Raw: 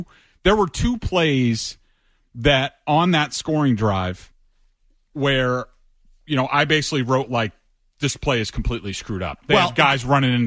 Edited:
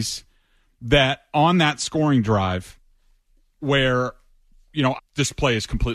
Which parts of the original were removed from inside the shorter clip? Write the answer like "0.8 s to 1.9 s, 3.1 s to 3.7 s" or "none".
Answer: 6.5 s to 7.8 s